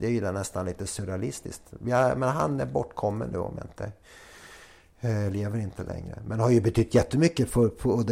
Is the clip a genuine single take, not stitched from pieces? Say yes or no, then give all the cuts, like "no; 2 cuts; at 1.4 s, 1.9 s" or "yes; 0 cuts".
yes; 0 cuts